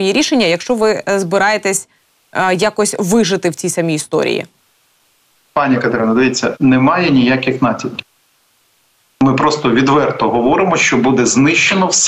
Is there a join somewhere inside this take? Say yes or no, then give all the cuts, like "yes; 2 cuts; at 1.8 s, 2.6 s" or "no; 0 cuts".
no; 0 cuts